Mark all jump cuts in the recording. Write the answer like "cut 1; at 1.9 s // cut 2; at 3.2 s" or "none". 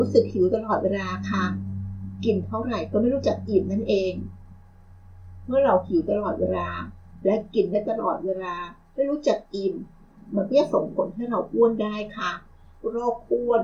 none